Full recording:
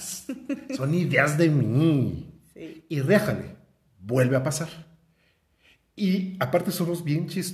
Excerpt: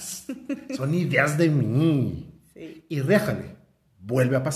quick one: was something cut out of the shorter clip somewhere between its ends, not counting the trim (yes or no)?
no